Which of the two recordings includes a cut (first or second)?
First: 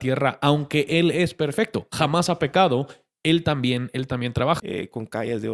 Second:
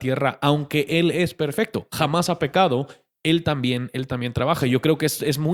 first